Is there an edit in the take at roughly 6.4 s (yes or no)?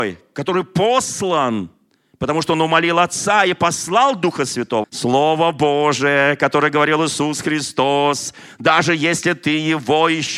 no